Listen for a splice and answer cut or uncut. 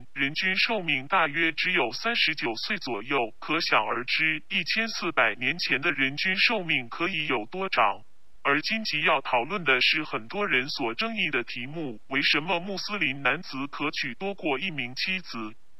cut